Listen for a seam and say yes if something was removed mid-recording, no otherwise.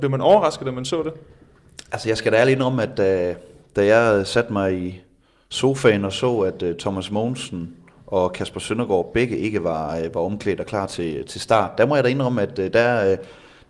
no